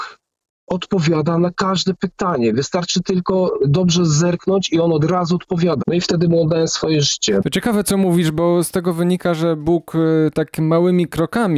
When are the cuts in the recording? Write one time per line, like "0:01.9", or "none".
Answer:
0:05.8